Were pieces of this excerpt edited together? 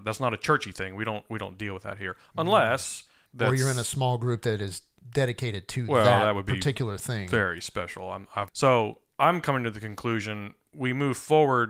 yes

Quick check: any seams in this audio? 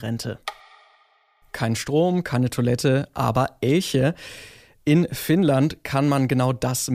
no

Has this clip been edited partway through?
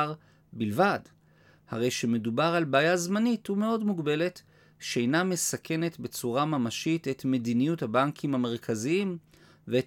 no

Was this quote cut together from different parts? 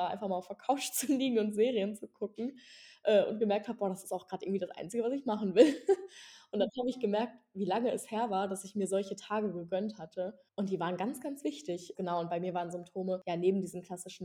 yes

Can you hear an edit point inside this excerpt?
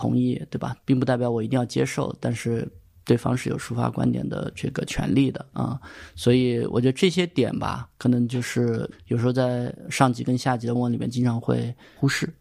yes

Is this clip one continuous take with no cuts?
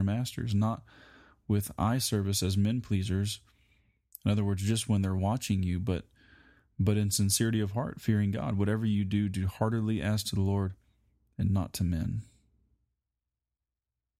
yes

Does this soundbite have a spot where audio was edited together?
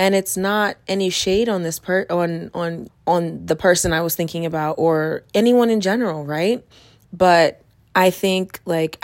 yes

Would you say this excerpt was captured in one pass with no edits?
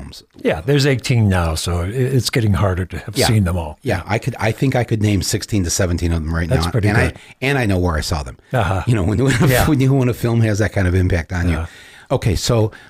yes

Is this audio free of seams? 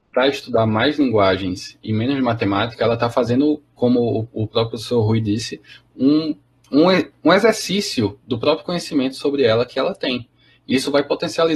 yes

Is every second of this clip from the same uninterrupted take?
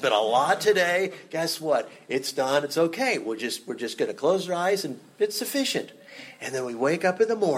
yes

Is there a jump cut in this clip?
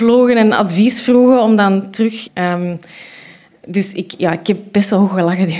yes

